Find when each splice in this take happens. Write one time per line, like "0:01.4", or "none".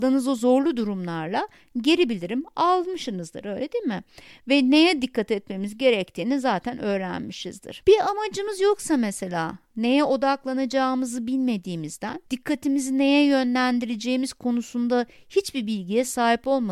0:07.8
0:12.3